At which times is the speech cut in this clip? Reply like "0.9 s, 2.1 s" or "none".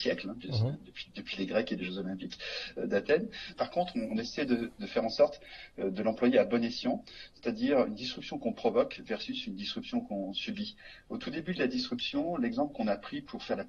3.5 s